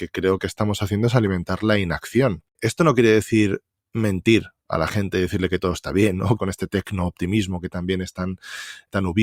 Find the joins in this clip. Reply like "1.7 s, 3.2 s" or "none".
6.4 s